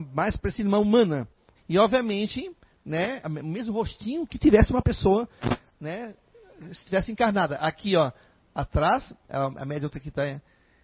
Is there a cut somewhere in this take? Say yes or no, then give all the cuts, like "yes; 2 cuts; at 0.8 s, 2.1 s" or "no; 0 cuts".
yes; 2 cuts; at 1.6 s, 3.2 s